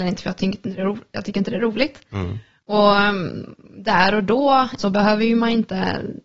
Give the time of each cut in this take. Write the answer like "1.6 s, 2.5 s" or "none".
4.8 s

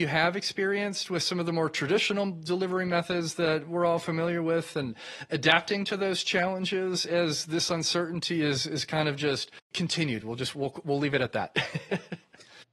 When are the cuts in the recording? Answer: none

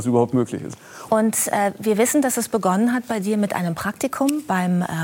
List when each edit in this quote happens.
1.1 s

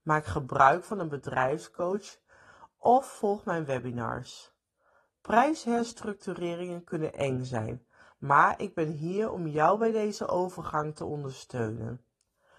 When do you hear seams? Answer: none

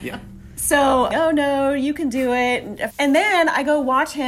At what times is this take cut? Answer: 1.1 s, 2.9 s

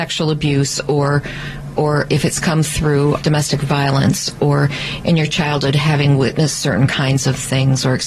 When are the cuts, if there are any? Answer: 3.2 s

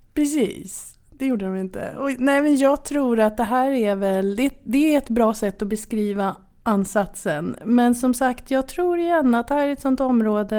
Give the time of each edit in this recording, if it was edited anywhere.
none

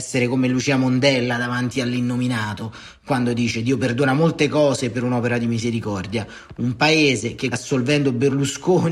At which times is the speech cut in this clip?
7.5 s

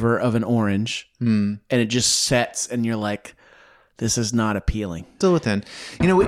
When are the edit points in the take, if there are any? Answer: 5.2 s

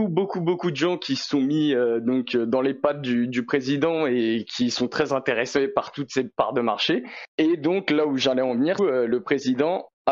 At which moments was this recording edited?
7.3 s, 8.8 s

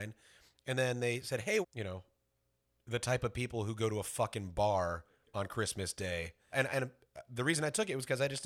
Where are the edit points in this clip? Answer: 1.6 s, 6.5 s

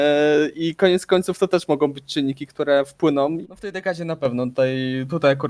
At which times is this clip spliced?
3.4 s

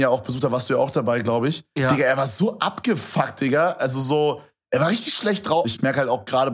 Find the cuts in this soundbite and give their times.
5.6 s

